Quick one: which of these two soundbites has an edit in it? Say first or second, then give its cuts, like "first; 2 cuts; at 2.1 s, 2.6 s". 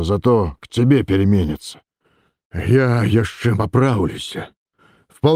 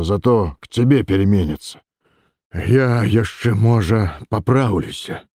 first; 1 cut; at 3.5 s